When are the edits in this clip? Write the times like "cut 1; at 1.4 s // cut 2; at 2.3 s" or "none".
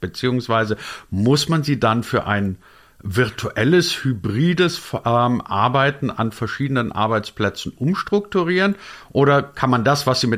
none